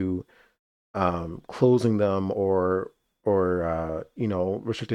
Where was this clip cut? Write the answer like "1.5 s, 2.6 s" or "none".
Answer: none

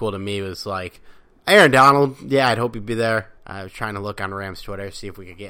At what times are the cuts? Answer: 3.4 s

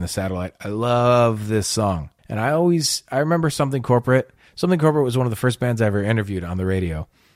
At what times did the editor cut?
2.2 s

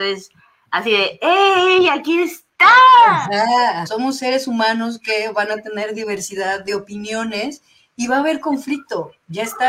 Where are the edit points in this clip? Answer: 3.9 s

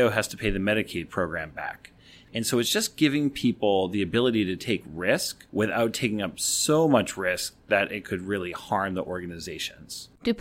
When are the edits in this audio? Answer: 2.2 s, 5.5 s

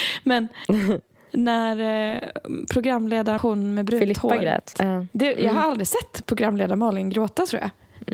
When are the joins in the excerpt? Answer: 3.4 s, 4.7 s

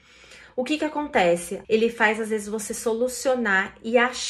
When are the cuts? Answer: 1.6 s

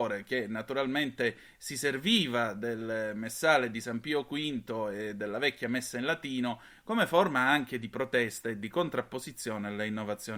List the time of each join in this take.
none

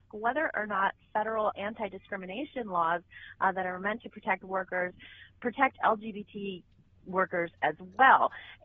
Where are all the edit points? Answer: none

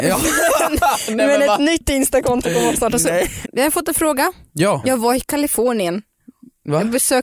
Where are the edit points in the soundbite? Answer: 3.4 s, 4.8 s

